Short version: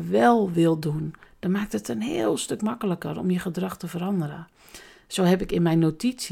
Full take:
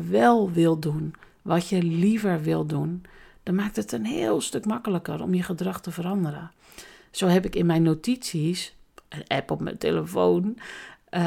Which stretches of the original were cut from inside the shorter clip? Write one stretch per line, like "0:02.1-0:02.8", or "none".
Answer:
0:01.3-0:03.3